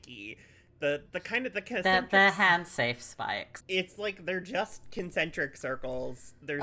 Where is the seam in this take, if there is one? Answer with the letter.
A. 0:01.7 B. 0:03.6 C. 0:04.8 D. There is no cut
B